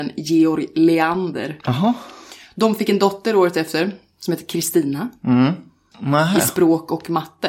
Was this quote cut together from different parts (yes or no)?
yes